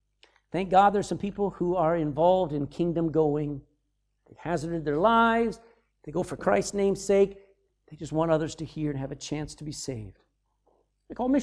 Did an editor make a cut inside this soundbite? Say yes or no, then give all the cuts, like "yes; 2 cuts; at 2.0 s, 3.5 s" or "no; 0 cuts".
yes; 1 cut; at 7.7 s